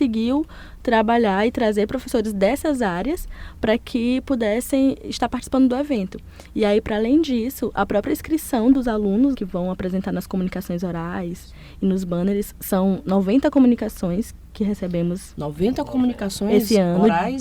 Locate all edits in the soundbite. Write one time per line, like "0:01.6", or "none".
0:09.3